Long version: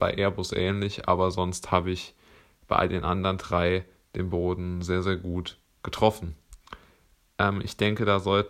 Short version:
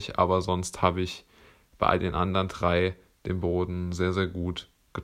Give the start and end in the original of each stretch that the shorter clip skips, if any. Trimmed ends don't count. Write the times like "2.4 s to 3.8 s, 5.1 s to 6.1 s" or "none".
none